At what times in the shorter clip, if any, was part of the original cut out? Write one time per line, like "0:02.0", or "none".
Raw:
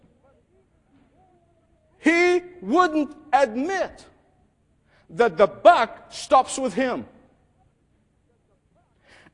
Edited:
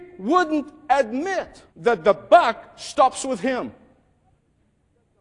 0:01.7

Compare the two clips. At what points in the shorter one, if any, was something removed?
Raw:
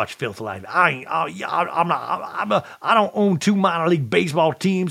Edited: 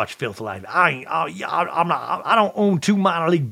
0:02.2

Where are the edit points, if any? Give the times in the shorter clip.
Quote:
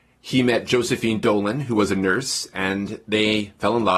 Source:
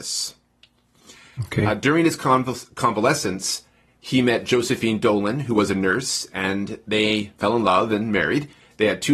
none

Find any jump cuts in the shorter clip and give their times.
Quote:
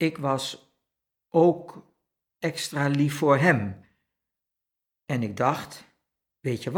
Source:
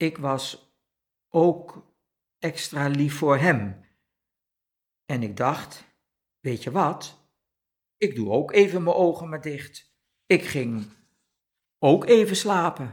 none

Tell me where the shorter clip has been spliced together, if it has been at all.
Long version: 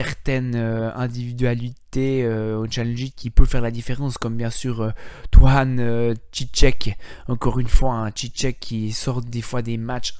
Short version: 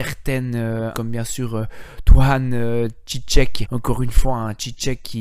0:00.9
0:03.6

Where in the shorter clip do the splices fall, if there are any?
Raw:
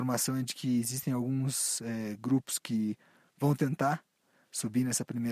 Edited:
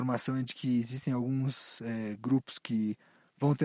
none

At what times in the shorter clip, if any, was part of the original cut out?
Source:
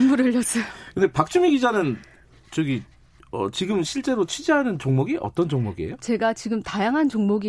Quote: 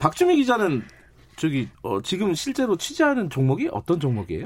0:01.7

